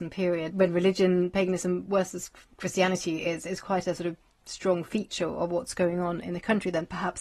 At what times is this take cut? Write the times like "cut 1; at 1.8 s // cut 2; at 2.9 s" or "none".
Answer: none